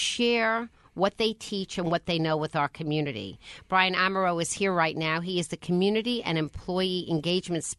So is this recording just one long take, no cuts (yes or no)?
yes